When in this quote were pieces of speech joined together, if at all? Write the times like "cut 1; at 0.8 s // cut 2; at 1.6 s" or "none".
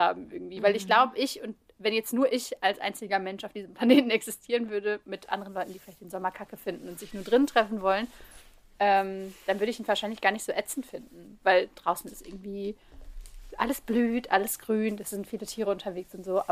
none